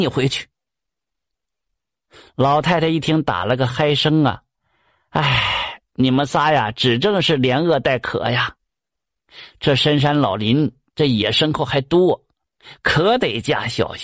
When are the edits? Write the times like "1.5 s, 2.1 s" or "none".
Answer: none